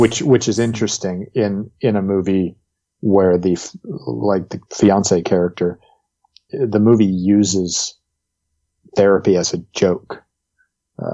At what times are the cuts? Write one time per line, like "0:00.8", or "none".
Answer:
0:04.7
0:06.5